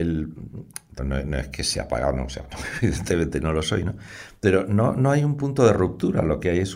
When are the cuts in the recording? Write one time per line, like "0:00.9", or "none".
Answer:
0:01.0